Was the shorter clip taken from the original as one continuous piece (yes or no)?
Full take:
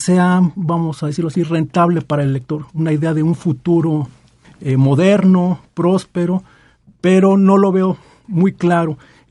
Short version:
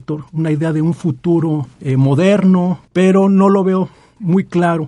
no